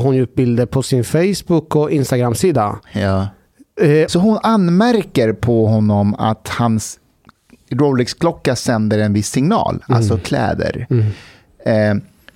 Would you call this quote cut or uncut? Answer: cut